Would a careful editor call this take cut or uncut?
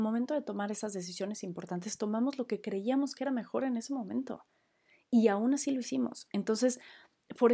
uncut